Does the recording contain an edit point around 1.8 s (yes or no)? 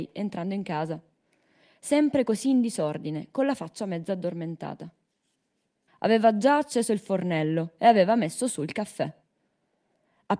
no